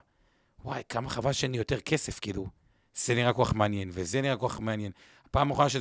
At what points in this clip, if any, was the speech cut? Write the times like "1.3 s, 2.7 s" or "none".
none